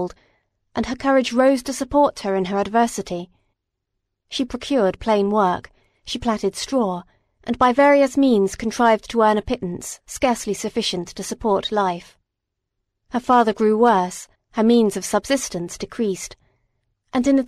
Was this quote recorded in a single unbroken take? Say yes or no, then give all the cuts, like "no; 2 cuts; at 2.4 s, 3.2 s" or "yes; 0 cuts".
no; 2 cuts; at 13.0 s, 14.3 s